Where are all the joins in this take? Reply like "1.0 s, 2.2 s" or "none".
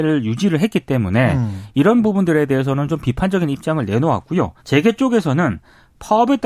4.6 s